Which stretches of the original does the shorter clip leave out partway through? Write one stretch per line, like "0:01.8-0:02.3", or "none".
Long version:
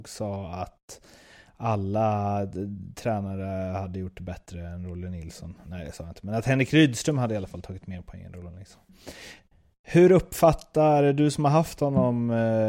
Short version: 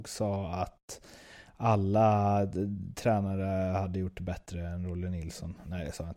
none

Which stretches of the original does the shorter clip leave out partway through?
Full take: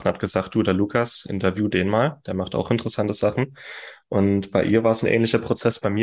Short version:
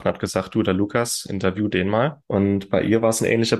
0:02.2-0:04.0

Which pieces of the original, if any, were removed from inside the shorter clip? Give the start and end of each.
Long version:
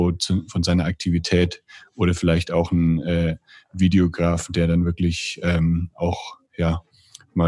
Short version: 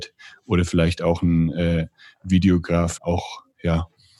0:04.5-0:05.9

